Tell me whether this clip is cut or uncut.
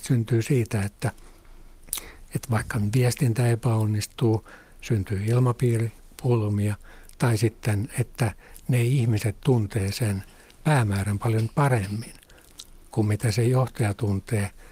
uncut